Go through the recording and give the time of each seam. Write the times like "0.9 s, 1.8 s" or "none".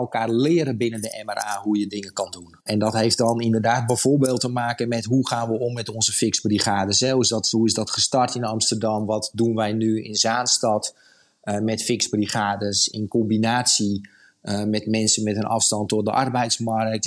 2.6 s